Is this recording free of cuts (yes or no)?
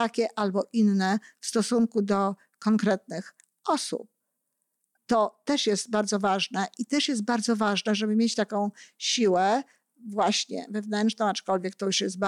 no